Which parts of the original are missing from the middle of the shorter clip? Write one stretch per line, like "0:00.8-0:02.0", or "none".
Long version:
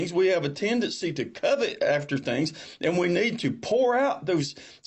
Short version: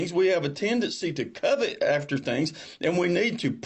none

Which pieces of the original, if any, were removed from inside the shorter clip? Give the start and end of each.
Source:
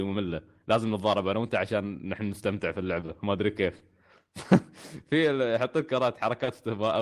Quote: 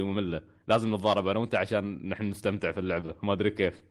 none

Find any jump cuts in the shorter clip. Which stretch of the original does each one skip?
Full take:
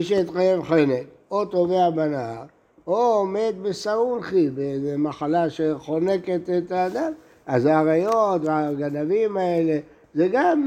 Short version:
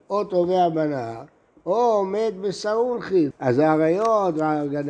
0:04.5-0:07.4

